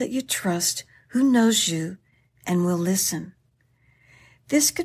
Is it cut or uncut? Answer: uncut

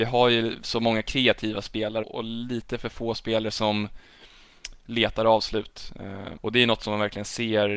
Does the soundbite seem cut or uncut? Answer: cut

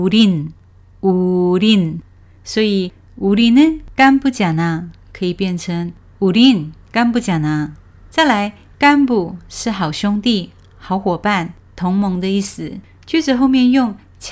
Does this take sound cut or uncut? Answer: uncut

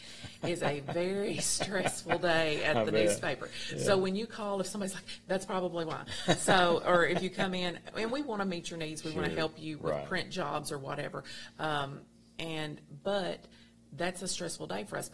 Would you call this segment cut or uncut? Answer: cut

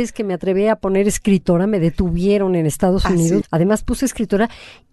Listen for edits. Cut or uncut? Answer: cut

